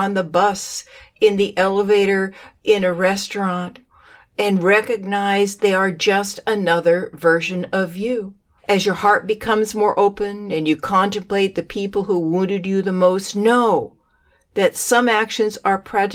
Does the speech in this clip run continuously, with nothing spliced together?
no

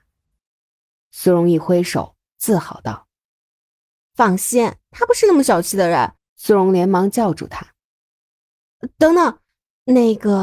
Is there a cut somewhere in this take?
yes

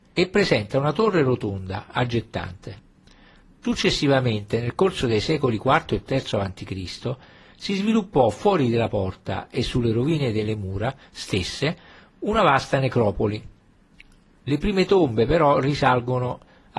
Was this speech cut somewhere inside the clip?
yes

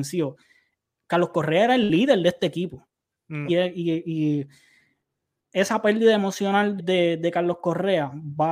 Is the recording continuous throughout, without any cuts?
no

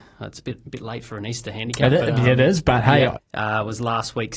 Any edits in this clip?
yes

